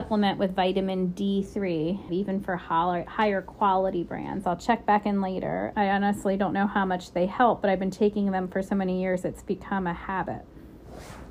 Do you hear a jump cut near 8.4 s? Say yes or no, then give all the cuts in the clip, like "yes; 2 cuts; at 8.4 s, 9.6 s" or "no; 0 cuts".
no; 3 cuts; at 2.1 s, 4.4 s, 5.7 s